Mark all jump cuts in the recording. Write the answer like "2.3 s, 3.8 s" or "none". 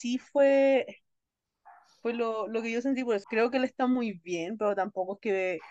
3.2 s